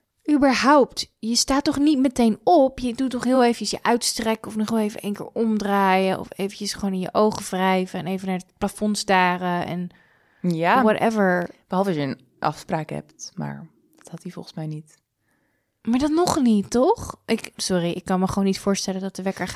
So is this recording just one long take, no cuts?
yes; 0 cuts

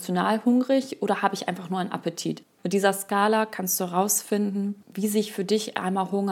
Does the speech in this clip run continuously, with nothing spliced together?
no; 2 cuts; at 2.4 s, 4.8 s

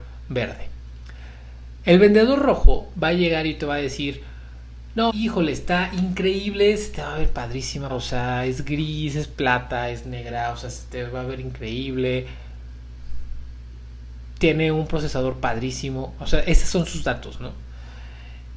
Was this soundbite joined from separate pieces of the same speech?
yes; 2 cuts; at 5.1 s, 7.9 s

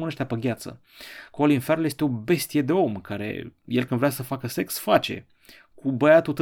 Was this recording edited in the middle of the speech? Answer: no; 0 cuts

